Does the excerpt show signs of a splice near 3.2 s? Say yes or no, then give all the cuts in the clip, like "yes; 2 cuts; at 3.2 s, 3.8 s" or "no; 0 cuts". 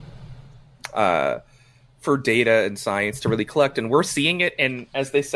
no; 0 cuts